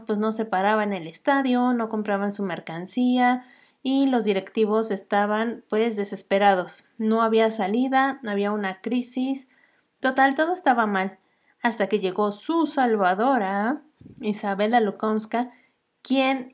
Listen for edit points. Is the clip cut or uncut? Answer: uncut